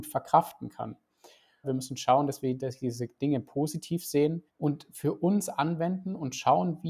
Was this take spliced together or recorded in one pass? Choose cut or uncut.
cut